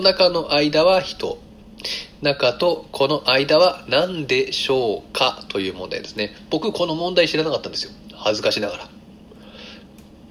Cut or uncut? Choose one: uncut